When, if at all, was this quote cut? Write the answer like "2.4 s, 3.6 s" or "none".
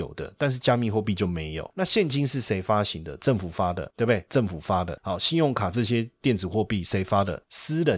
4.3 s